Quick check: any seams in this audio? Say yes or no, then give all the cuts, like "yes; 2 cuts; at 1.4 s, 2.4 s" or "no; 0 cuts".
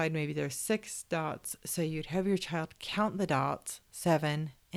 no; 0 cuts